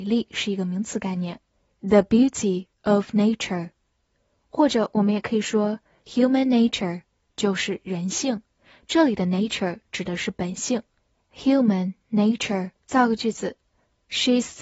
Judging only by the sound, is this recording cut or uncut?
cut